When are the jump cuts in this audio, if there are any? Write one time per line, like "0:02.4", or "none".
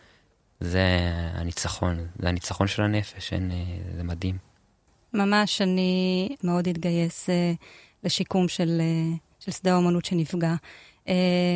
0:06.4